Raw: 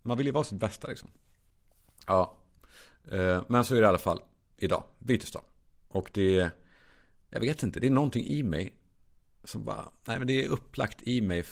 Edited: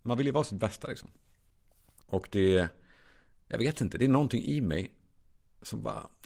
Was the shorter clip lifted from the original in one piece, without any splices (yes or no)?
no